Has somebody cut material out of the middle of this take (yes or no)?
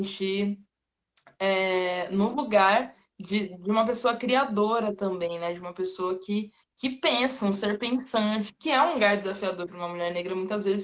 yes